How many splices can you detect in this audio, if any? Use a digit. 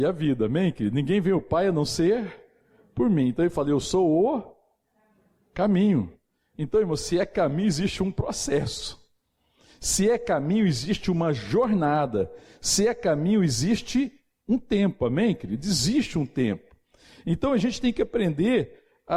0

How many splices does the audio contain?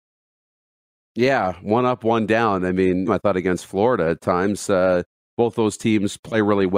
1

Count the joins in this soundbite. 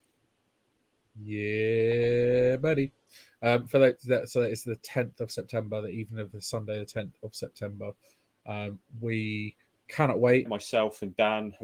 1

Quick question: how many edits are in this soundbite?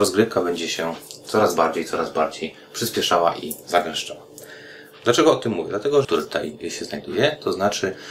1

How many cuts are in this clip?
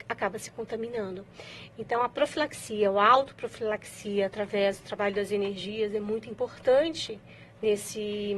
0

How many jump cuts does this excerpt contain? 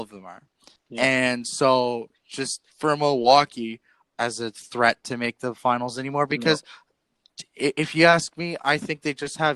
2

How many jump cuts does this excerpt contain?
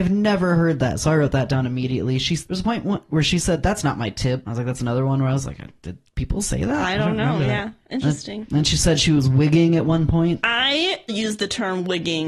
1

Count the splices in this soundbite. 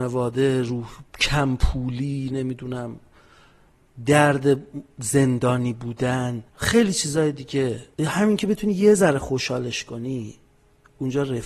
3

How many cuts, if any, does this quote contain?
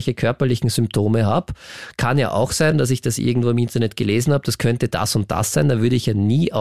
0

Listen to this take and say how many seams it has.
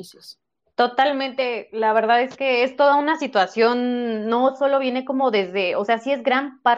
0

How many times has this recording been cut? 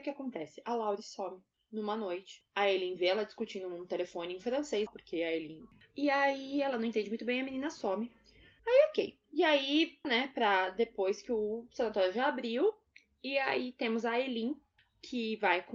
3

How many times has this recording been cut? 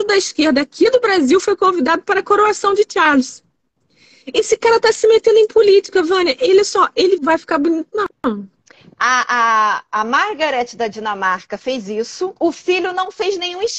2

